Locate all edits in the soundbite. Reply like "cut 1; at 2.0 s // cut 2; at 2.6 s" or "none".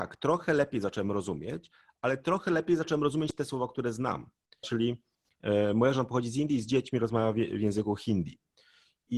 cut 1; at 4.6 s